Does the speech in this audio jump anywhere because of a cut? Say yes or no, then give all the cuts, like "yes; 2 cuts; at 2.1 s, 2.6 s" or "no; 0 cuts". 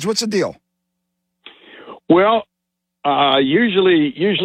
no; 0 cuts